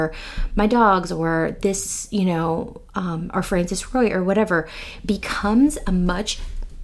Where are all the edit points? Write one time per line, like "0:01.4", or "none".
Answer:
none